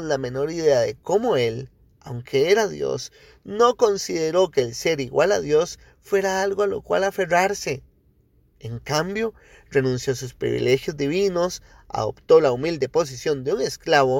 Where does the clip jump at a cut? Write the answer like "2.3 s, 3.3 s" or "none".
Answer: none